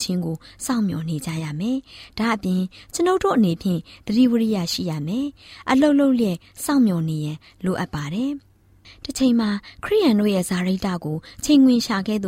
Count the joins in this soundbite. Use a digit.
0